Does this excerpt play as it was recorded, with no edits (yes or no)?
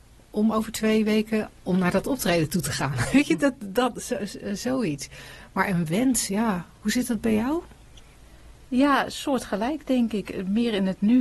no